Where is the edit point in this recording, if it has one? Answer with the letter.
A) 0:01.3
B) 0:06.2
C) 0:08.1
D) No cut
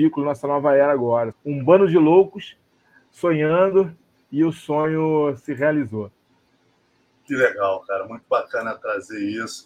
A